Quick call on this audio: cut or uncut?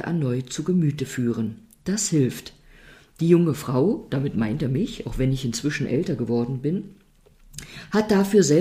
uncut